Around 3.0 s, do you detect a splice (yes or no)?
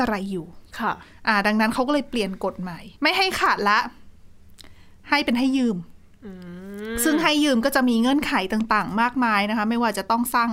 yes